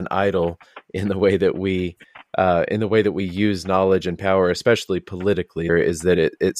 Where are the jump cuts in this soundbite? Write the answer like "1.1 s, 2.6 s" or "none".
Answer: 5.7 s

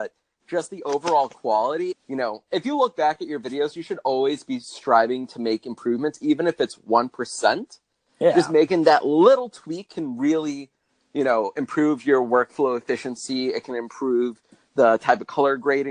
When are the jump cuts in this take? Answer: 1.9 s

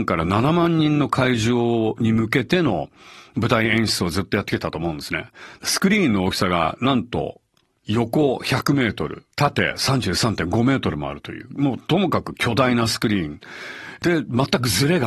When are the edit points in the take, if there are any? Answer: 9.3 s

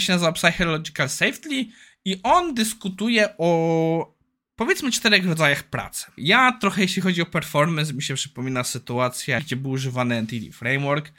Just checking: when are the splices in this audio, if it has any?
6.2 s, 9.4 s

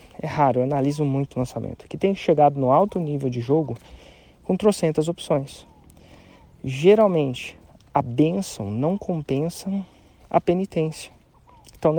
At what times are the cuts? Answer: none

